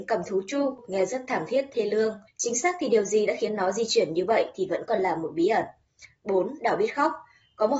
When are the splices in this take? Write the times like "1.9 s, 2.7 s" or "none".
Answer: 2.3 s

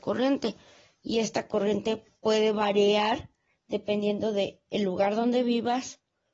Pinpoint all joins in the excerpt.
none

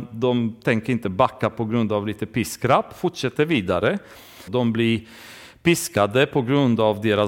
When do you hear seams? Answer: 4.5 s

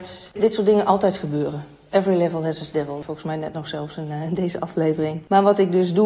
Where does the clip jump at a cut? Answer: 3.0 s

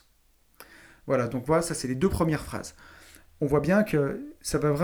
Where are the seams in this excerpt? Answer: none

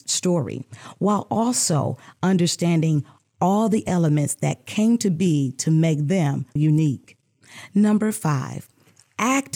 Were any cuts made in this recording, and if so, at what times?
6.6 s

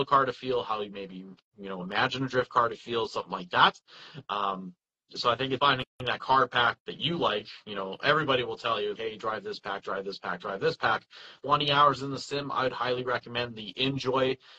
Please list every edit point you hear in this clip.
5.6 s, 9.0 s, 11.4 s

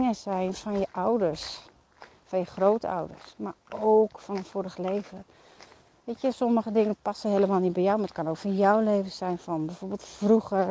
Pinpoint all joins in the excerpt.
none

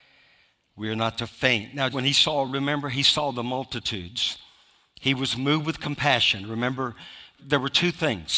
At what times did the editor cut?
1.9 s, 7.4 s

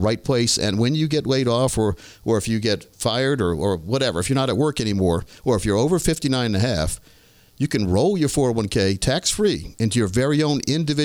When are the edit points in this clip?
none

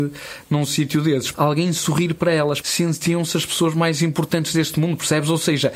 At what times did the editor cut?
1.3 s, 2.6 s

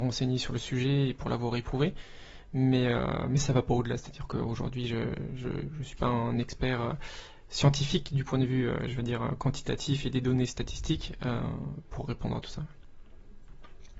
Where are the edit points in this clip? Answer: none

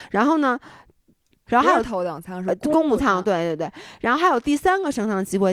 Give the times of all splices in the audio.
1.5 s

